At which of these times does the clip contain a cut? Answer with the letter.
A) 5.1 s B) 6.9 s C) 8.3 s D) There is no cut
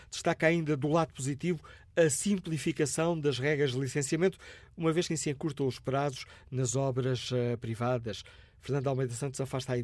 A